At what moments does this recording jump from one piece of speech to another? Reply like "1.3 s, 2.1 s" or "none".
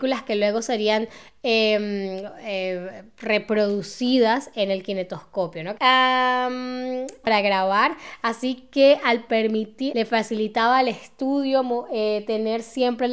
5.8 s, 7.2 s, 9.9 s